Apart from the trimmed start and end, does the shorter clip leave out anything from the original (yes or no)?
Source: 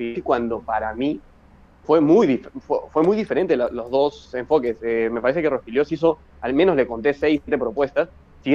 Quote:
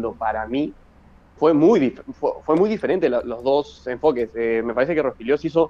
no